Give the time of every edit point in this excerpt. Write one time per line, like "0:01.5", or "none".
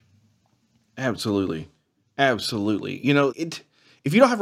0:03.3